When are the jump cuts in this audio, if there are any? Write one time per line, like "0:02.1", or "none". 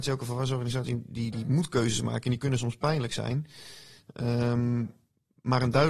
0:01.3